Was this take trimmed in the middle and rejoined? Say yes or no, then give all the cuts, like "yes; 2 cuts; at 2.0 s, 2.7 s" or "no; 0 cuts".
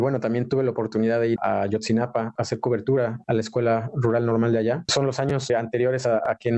yes; 2 cuts; at 1.4 s, 4.8 s